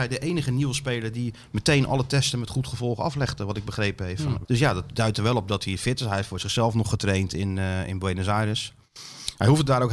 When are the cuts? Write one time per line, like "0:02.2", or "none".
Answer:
0:04.4